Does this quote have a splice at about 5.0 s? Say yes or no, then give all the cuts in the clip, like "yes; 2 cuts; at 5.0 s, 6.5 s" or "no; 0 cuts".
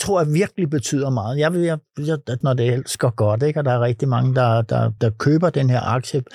yes; 2 cuts; at 2.4 s, 5.0 s